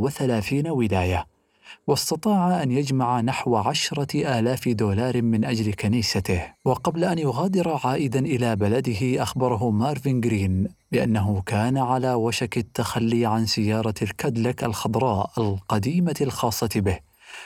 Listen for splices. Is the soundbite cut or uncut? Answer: cut